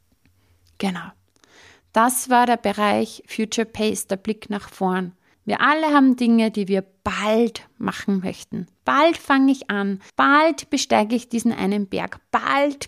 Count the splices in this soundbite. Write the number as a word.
two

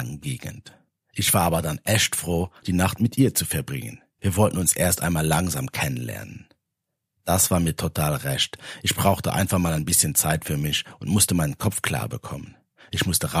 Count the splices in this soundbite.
two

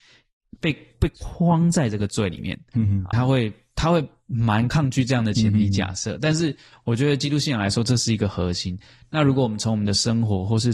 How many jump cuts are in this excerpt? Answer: one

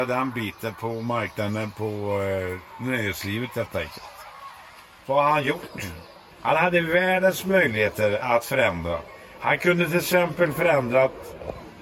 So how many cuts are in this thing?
one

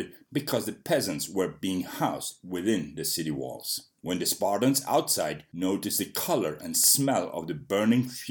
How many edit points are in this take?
one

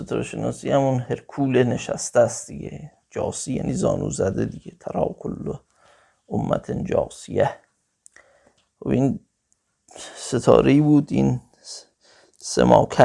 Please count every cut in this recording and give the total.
zero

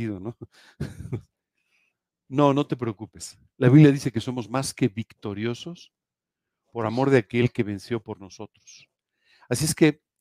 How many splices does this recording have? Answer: zero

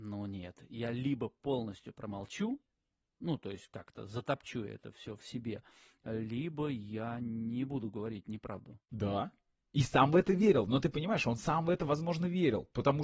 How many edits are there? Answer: one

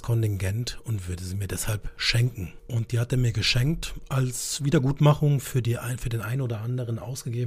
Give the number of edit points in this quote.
one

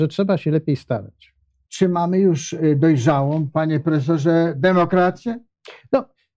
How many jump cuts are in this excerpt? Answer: one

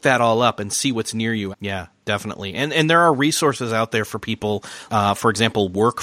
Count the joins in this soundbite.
two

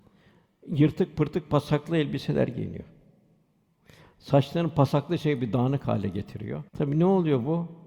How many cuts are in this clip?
one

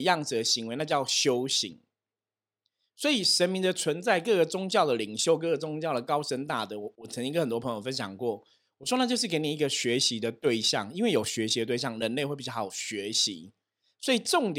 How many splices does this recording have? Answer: one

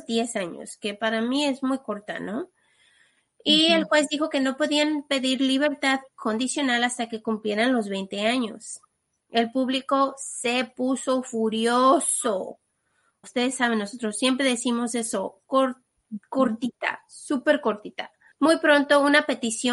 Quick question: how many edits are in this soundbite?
one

